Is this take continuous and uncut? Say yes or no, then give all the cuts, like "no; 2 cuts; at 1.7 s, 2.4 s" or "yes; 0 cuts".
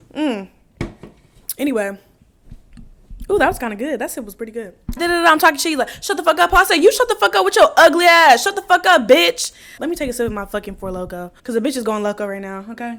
no; 3 cuts; at 5.0 s, 9.8 s, 11.4 s